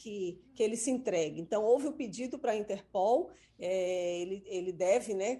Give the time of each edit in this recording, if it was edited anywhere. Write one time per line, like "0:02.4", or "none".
none